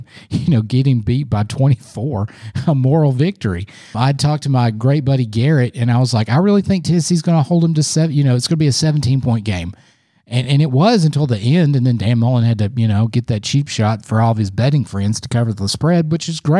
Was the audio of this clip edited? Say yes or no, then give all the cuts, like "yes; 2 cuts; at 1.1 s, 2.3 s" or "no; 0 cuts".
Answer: no; 0 cuts